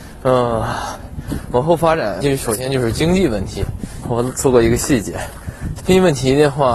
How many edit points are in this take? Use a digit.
3